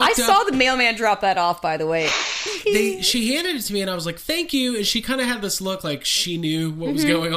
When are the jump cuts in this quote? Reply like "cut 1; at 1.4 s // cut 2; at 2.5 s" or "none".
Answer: none

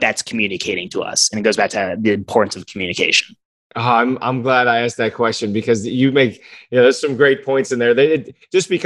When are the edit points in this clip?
none

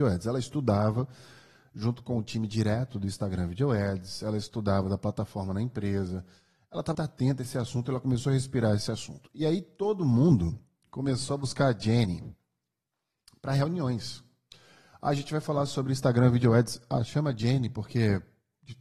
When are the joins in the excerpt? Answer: cut 1; at 6.9 s

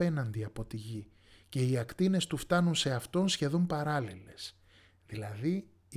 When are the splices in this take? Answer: none

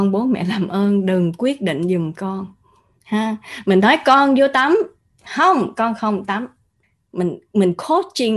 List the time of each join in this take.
none

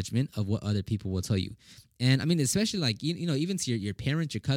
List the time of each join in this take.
none

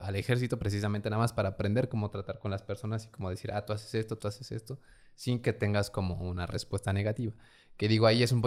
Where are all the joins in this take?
cut 1; at 4.2 s

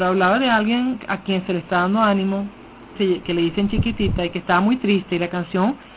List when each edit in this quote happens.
cut 1; at 3.0 s

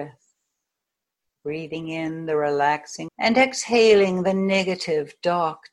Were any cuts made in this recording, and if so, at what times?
cut 1; at 3.1 s

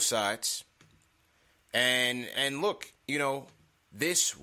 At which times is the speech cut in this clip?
cut 1; at 2.3 s

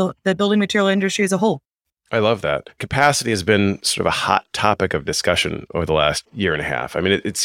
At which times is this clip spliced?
cut 1; at 2.8 s

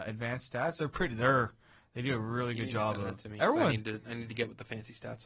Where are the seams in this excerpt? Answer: none

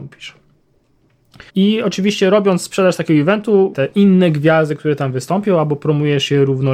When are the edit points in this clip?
cut 1; at 1.5 s // cut 2; at 3.7 s

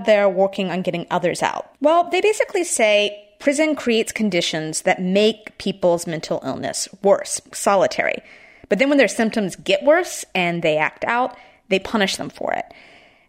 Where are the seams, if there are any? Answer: cut 1; at 1.7 s // cut 2; at 7.5 s

